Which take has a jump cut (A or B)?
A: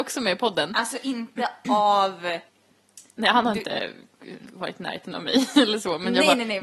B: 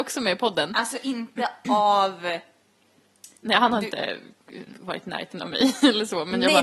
A